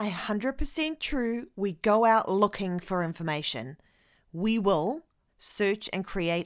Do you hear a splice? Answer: yes; 1 cut; at 5.3 s

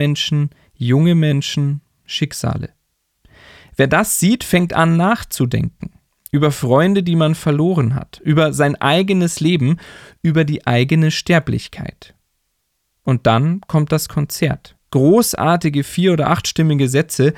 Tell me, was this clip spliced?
yes; 1 cut; at 14.9 s

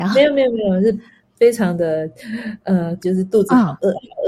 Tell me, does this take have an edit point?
yes; 1 cut; at 3.0 s

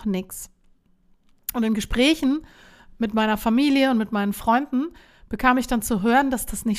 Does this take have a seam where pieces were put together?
no; 0 cuts

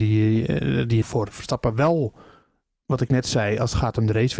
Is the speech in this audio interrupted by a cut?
yes; 1 cut; at 1.0 s

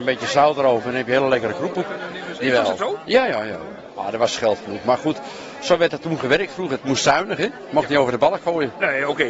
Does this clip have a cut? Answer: yes; 1 cut; at 2.4 s

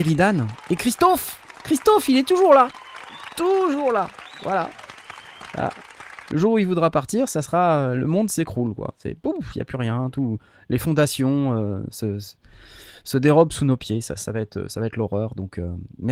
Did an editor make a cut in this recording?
no; 0 cuts

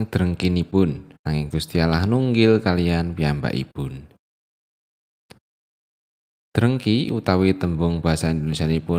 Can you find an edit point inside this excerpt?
yes; 1 cut; at 1.2 s

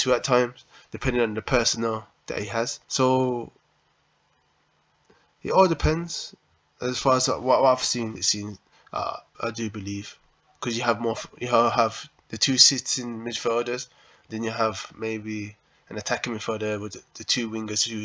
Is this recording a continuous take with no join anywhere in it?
no; 3 cuts; at 2.8 s, 8.2 s, 9.3 s

